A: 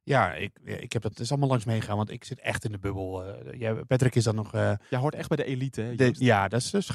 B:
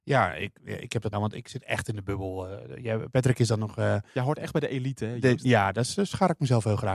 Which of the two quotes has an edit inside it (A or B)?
B